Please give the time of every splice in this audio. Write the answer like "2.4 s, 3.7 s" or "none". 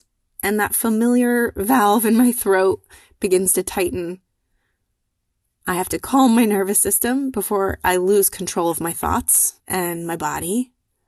5.6 s, 9.6 s